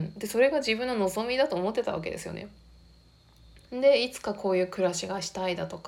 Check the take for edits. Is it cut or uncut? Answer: cut